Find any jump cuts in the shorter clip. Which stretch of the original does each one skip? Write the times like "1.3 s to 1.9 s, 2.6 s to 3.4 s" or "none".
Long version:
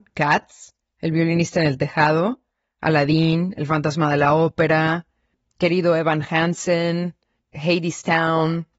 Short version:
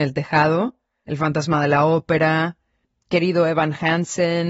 2.7 s to 3.5 s